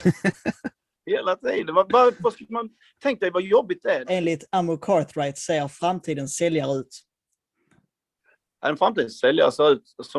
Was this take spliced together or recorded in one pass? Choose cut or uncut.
cut